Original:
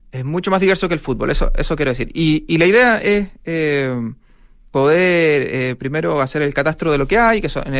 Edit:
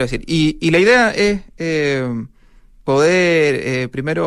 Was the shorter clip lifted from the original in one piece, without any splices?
yes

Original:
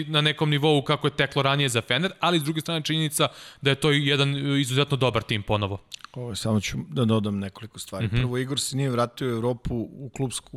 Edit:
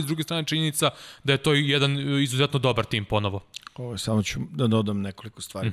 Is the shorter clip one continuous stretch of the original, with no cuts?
yes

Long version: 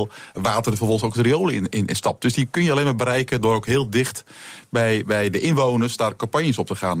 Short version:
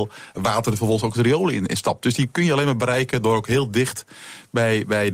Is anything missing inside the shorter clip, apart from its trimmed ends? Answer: yes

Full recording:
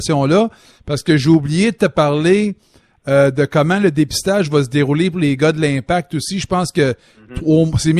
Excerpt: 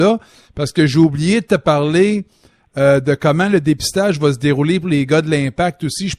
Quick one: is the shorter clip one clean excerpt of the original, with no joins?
yes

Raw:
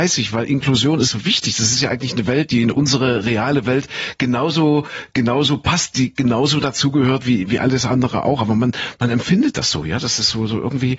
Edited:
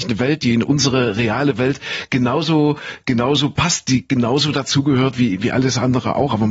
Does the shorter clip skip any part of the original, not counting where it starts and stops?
no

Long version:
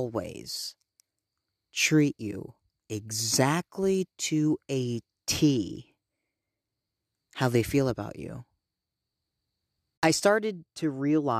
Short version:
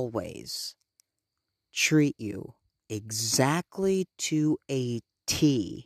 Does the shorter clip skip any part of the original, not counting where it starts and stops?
no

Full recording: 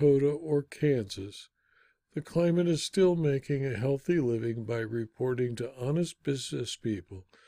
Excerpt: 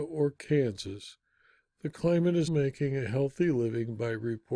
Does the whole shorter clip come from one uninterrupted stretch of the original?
no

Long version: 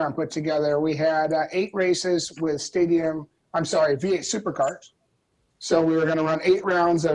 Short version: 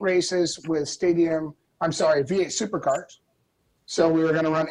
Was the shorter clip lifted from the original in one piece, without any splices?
yes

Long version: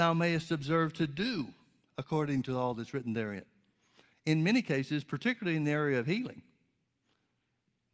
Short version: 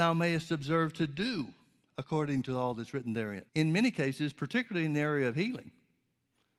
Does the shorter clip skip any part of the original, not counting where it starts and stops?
yes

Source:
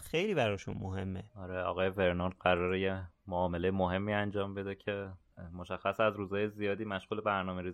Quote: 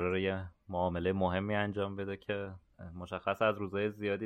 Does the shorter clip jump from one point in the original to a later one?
no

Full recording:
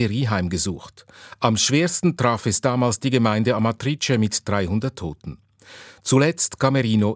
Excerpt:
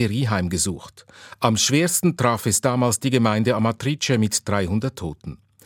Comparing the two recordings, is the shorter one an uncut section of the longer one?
yes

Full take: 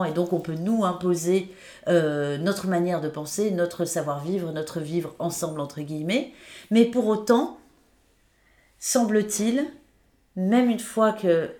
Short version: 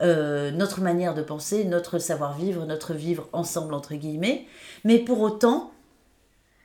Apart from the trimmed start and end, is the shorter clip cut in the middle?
no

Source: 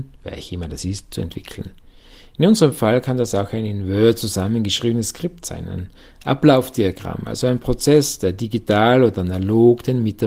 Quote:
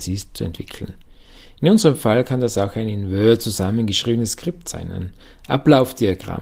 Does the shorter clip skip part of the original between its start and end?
no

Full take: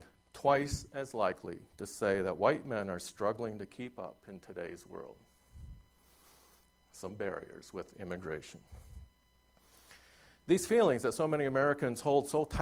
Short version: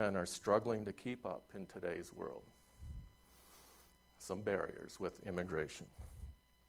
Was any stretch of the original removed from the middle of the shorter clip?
no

